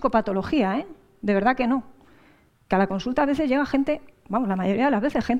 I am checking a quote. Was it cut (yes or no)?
no